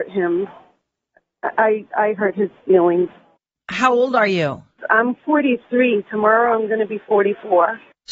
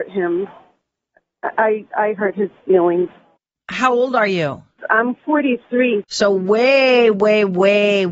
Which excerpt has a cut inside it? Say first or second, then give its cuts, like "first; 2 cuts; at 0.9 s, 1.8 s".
second; 1 cut; at 6.0 s